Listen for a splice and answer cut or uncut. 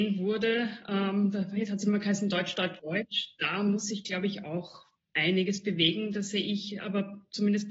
cut